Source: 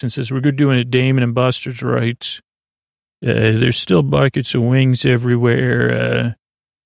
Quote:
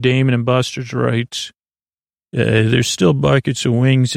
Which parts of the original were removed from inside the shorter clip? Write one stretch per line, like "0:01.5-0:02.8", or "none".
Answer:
none